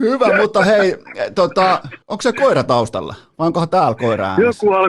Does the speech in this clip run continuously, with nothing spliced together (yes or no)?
no